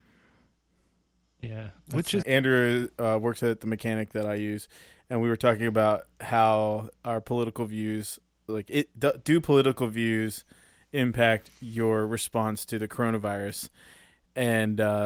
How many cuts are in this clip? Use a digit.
1